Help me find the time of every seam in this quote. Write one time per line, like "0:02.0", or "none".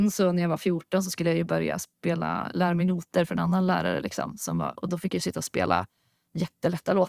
none